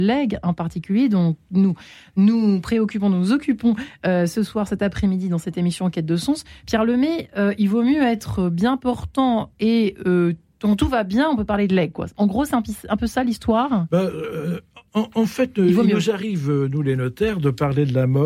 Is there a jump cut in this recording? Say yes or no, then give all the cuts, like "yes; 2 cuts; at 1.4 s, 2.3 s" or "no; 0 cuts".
no; 0 cuts